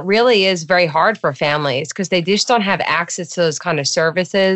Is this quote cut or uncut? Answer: uncut